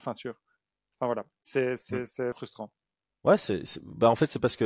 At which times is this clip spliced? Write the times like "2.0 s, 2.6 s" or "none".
2.3 s